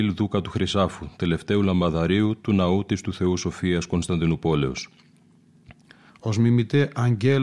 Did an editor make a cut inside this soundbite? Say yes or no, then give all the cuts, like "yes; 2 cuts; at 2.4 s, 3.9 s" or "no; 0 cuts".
yes; 1 cut; at 6.1 s